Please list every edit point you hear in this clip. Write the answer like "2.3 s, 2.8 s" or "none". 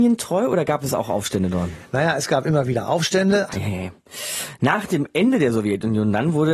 3.5 s